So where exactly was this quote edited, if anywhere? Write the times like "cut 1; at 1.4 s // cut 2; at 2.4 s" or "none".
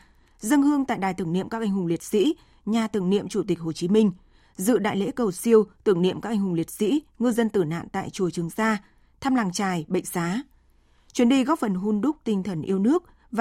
none